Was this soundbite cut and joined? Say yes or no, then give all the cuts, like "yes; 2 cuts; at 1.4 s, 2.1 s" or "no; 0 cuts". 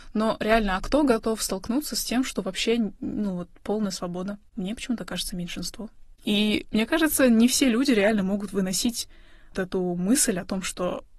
yes; 2 cuts; at 6.2 s, 9.5 s